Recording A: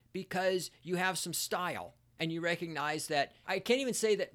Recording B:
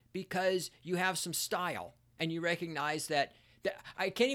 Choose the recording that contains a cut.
A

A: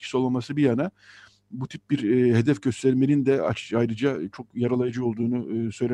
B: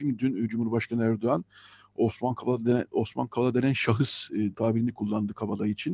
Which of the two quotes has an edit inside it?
B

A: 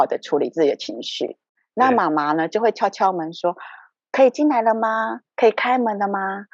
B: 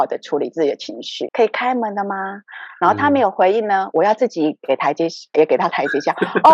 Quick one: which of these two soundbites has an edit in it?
B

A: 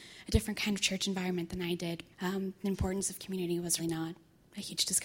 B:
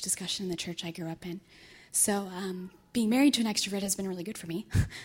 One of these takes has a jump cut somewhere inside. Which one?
A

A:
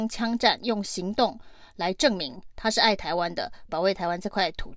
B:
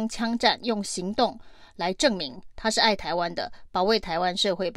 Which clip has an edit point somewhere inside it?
A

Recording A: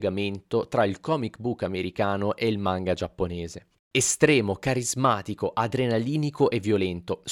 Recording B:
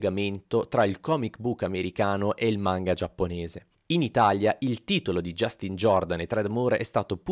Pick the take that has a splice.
A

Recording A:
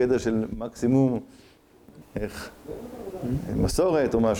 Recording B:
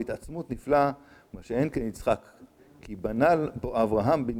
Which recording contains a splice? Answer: A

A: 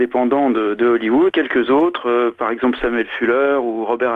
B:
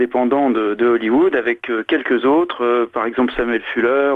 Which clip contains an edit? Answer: A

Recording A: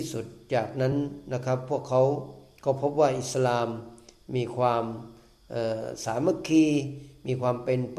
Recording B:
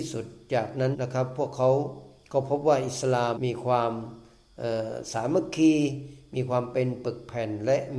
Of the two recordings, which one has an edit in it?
B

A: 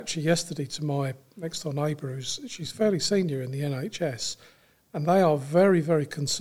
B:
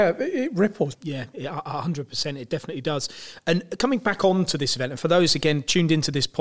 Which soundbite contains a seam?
B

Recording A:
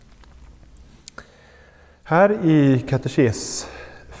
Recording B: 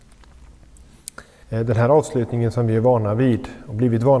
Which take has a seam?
B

